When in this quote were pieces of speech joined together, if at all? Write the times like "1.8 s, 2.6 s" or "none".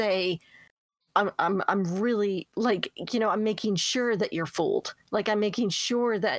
1.0 s